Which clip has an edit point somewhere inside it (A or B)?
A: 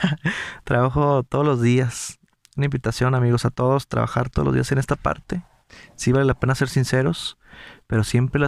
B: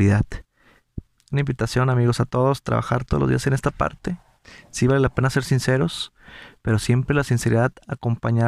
B